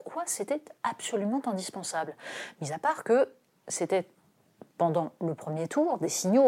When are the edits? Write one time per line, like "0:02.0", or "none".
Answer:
none